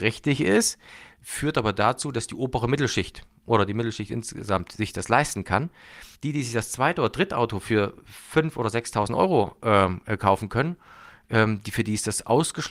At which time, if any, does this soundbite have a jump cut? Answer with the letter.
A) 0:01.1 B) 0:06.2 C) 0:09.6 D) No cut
B